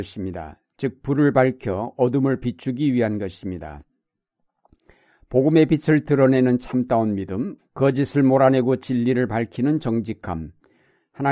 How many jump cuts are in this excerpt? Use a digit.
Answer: 1